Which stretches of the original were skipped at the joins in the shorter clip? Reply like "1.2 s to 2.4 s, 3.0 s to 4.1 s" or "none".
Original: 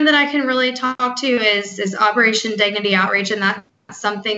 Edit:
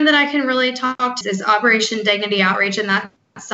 1.2 s to 1.7 s

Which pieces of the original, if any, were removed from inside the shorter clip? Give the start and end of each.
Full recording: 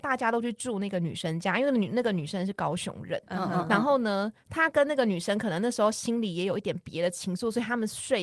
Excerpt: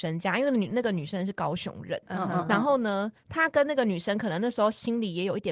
none

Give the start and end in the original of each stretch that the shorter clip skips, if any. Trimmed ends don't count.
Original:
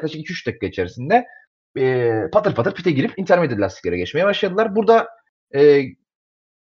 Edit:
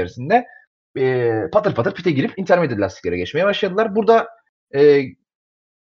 none

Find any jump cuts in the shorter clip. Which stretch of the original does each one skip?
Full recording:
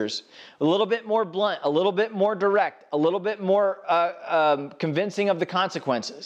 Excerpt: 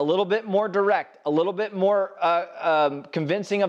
none

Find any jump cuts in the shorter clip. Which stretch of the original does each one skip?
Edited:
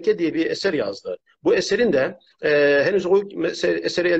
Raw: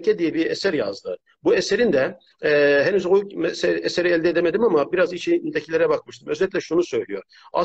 none

